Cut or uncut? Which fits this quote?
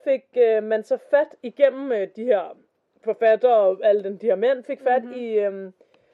uncut